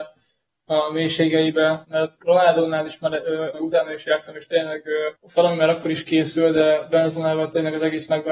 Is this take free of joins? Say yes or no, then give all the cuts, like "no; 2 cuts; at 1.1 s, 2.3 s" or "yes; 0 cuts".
no; 3 cuts; at 1.8 s, 3.5 s, 5.2 s